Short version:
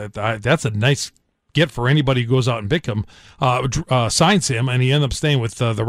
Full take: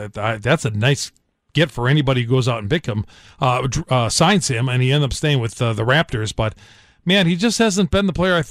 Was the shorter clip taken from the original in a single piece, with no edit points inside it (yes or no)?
yes